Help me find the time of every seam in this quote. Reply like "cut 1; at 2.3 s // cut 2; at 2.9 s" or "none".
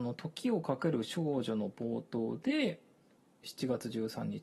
cut 1; at 3.4 s